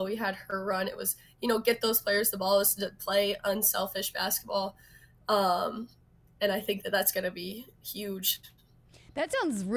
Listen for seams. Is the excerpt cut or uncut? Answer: uncut